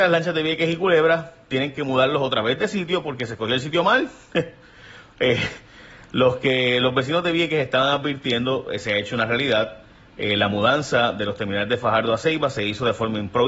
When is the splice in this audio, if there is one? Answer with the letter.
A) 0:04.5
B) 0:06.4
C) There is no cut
C